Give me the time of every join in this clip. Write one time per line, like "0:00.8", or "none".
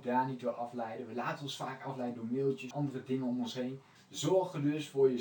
0:02.7
0:04.0